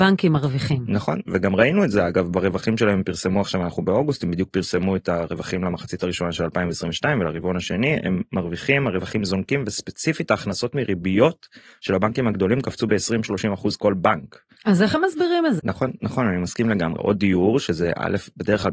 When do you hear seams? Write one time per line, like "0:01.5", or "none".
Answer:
0:15.6
0:17.0